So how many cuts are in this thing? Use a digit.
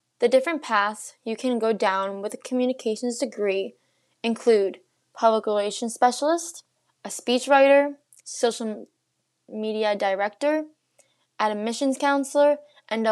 1